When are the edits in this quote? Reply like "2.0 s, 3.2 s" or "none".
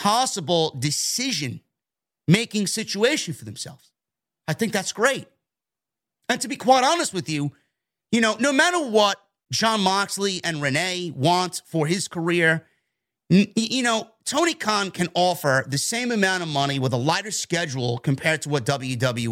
none